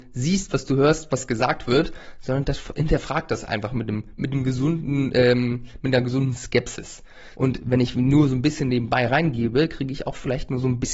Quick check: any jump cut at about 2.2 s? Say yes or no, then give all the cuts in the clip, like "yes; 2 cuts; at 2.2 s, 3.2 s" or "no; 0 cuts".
no; 1 cut; at 7.3 s